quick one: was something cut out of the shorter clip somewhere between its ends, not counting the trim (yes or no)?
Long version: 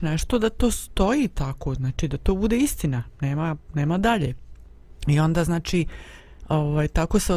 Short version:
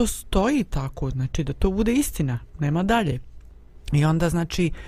yes